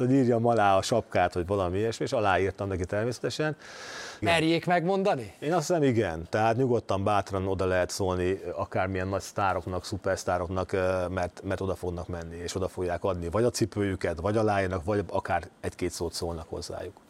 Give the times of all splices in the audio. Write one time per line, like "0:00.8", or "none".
0:04.2